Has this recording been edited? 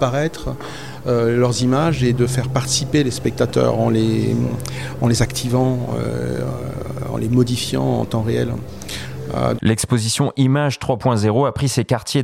yes; 1 cut; at 9.6 s

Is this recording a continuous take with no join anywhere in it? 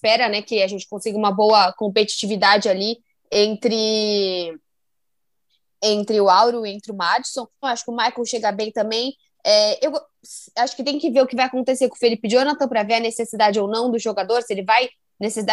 no; 1 cut; at 7.6 s

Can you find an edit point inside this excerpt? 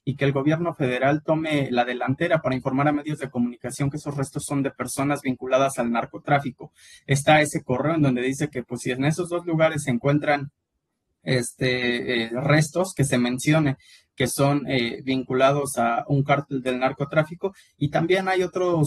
yes; 1 cut; at 7.0 s

